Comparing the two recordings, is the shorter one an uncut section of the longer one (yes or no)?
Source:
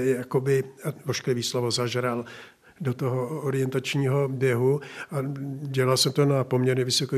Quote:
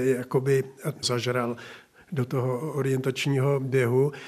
no